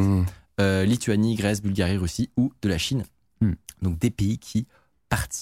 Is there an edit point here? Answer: no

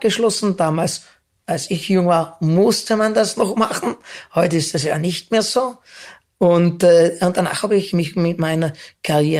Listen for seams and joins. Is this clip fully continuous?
yes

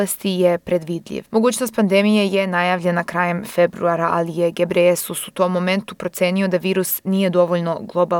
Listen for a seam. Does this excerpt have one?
yes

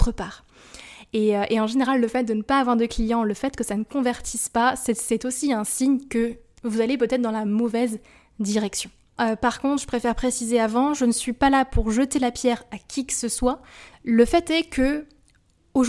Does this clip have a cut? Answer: yes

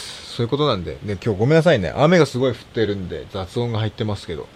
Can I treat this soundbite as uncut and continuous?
yes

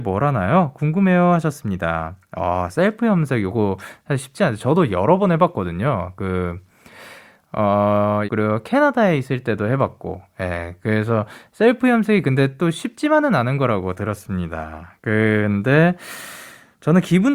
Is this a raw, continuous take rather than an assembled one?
no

